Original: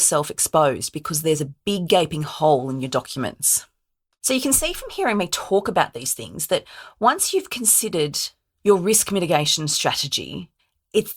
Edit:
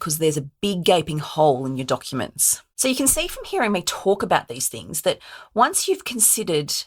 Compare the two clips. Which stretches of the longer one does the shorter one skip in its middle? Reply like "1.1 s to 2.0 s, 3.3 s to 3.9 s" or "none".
3.7 s to 4.2 s